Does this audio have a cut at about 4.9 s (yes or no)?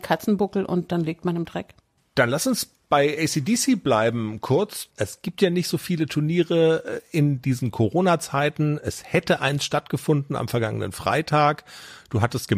no